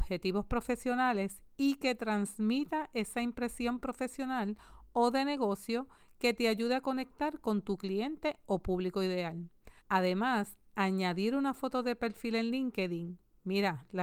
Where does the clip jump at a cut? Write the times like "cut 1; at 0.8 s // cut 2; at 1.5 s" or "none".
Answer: cut 1; at 9.8 s